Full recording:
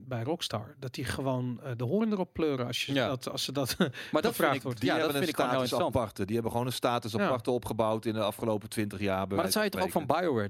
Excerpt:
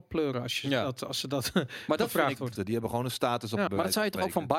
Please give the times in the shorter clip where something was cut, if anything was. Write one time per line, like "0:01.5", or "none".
0:02.6
0:03.7